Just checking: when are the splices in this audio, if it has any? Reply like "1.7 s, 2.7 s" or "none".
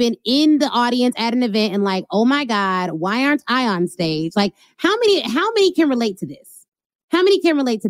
none

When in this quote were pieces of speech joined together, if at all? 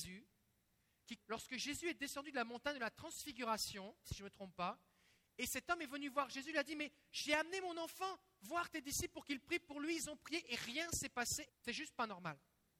1.2 s, 4.0 s, 11.5 s

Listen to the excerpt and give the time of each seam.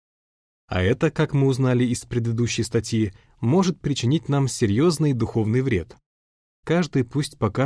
6.6 s

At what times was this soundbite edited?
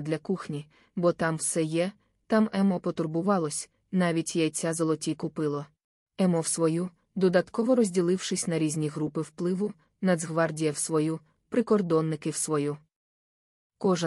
6.0 s

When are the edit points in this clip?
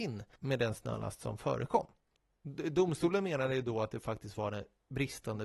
none

